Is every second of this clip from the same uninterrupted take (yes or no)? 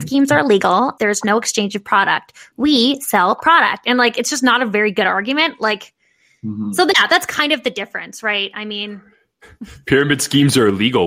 no